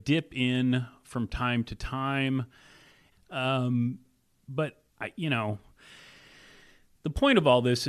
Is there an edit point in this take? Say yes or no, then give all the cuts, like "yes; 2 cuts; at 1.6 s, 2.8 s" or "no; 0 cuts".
yes; 2 cuts; at 3.1 s, 4.9 s